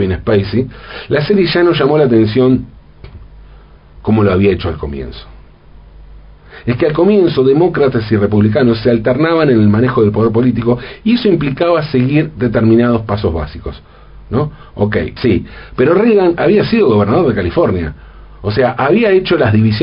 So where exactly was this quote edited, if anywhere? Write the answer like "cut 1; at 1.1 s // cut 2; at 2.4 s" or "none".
cut 1; at 15.2 s

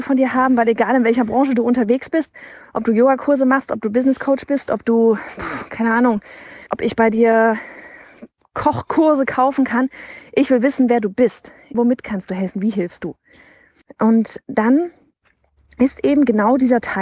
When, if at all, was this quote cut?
cut 1; at 6.7 s // cut 2; at 11.7 s // cut 3; at 13.8 s

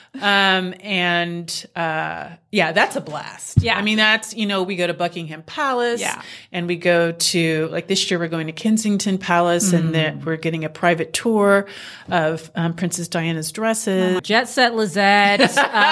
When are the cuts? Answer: cut 1; at 14.2 s

